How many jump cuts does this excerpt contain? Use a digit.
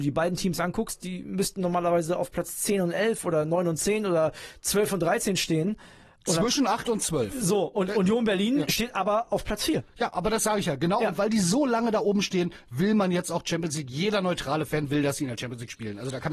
0